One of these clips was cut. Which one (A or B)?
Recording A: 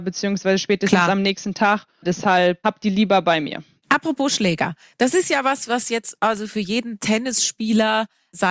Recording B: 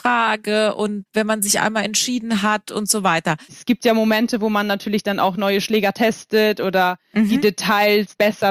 B